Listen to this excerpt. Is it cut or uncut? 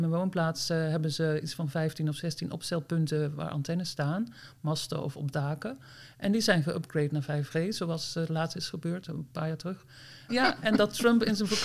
cut